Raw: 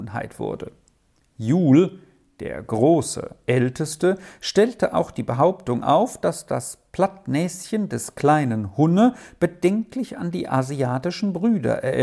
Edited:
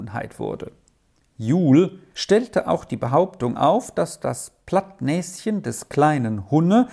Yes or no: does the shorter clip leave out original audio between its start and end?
yes